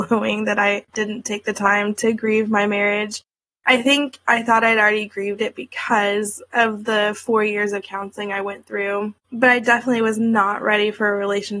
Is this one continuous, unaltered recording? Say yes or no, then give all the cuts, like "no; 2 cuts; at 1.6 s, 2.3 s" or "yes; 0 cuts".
no; 1 cut; at 9.2 s